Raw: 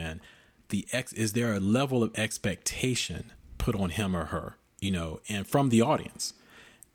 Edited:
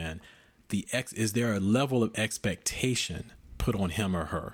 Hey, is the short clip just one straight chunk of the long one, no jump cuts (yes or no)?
yes